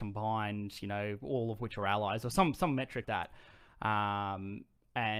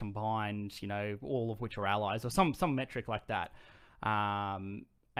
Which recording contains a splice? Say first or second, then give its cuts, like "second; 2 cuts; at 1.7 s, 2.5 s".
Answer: first; 1 cut; at 3.0 s